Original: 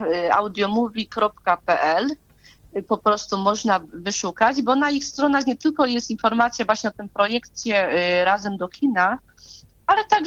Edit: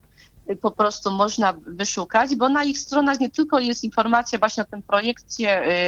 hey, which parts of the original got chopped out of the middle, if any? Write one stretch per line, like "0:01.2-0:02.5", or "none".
none